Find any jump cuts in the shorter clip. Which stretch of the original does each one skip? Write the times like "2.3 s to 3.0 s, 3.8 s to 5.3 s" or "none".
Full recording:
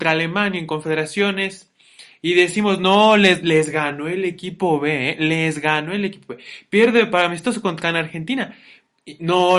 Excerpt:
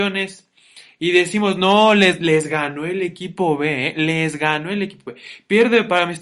none